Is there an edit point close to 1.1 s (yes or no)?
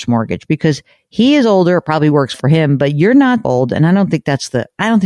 no